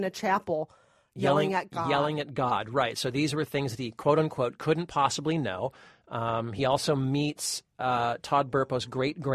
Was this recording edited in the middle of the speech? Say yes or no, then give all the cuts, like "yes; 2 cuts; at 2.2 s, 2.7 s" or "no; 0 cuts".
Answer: no; 0 cuts